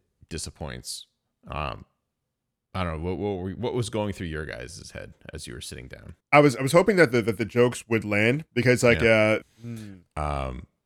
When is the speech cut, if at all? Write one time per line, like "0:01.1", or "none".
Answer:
0:06.2
0:09.4